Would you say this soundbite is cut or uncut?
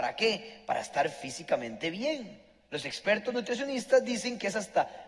uncut